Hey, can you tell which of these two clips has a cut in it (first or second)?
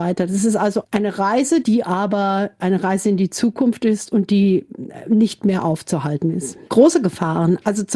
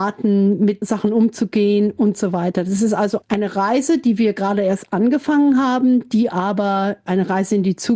first